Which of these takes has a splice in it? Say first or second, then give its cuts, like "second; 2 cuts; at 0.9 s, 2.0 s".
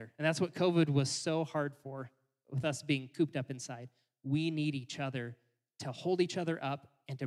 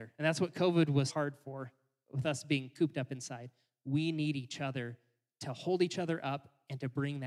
second; 1 cut; at 1.1 s